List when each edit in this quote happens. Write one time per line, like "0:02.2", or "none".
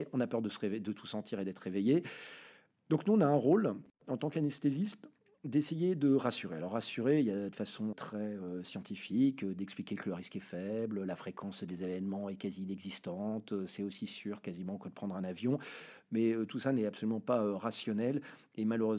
0:07.9